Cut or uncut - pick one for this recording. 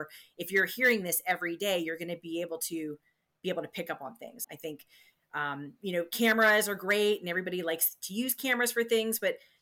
cut